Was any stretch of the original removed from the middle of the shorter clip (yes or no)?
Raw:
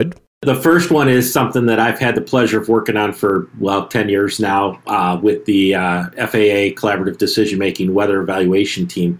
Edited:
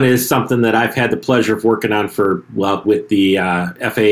yes